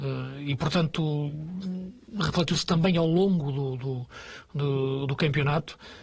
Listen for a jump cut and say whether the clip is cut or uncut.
uncut